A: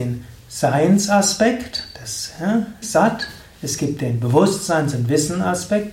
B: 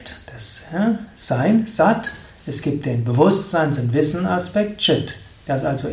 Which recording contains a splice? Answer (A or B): A